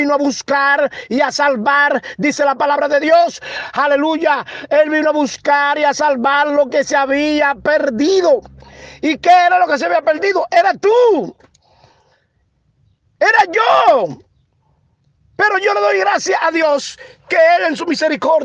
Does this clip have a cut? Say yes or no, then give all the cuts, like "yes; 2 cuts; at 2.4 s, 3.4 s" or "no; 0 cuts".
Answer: no; 0 cuts